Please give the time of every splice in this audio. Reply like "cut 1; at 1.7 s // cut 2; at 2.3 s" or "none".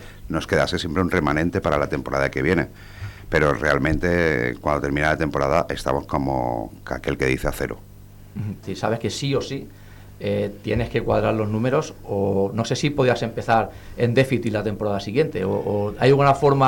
cut 1; at 8.6 s